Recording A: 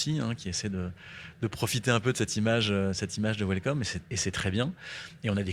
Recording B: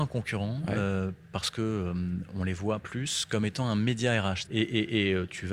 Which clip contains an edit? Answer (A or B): B